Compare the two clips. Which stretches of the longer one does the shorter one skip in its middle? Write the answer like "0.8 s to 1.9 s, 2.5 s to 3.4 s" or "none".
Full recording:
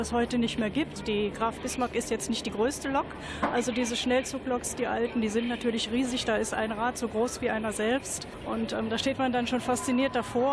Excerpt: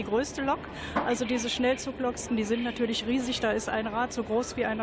4.8 s to 5.1 s

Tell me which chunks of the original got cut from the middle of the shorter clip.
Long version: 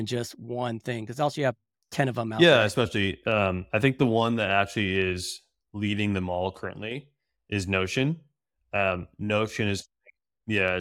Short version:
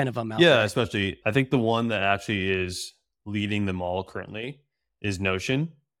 3.2 s to 3.7 s

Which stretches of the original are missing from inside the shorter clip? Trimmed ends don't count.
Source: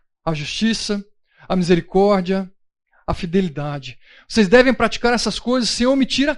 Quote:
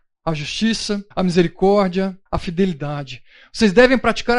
1.1 s to 1.4 s, 2.6 s to 3.0 s

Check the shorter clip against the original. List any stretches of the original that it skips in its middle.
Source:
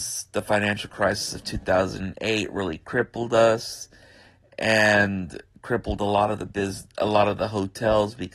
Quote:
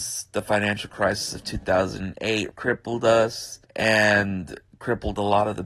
2.5 s to 2.8 s, 3.9 s to 4.5 s

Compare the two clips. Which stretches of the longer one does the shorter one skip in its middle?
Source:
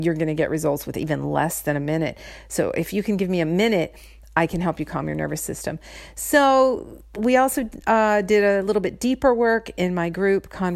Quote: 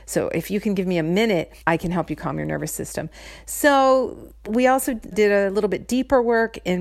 4.0 s to 4.3 s, 7.8 s to 8.2 s

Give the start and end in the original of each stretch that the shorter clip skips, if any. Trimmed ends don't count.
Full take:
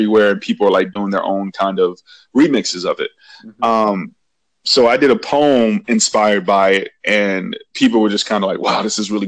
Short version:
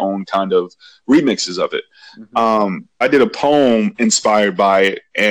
4.3 s to 4.9 s

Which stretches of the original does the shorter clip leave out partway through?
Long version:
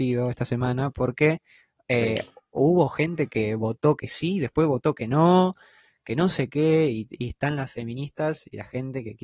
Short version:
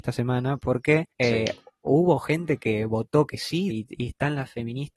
1.5 s to 1.8 s, 4.4 s to 6.9 s

